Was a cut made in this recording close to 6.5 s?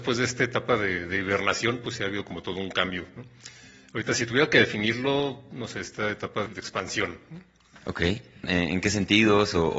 yes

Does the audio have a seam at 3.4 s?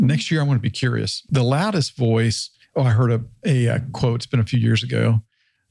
no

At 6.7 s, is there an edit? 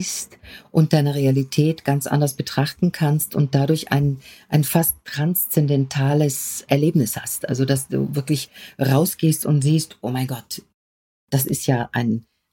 yes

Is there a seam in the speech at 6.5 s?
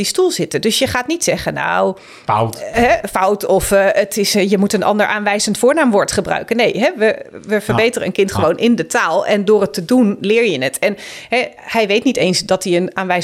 no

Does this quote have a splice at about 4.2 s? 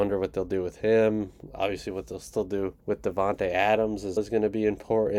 yes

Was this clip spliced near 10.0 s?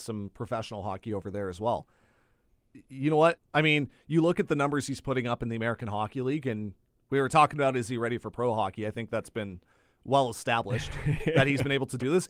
no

